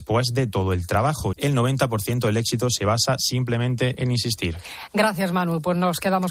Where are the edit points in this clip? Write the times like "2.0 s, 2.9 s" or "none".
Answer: 1.3 s